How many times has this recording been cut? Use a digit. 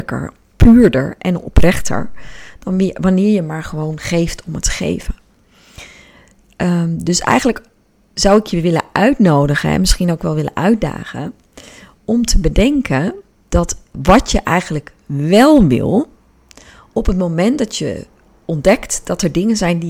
1